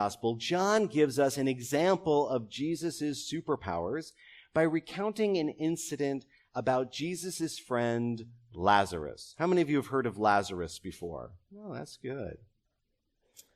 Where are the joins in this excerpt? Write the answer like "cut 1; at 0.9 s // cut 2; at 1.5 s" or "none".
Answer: none